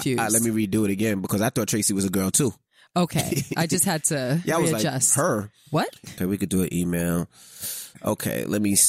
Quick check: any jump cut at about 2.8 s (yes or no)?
no